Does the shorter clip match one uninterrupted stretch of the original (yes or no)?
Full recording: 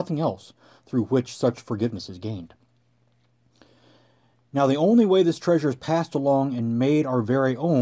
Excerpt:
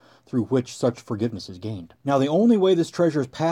no